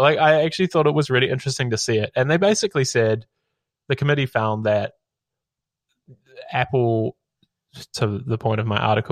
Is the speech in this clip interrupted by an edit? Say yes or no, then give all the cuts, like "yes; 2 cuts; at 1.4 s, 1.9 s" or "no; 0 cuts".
no; 0 cuts